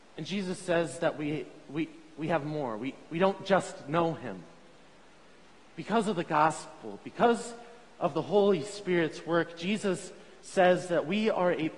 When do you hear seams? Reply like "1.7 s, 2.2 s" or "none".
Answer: none